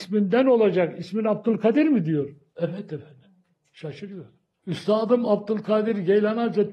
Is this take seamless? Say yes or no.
yes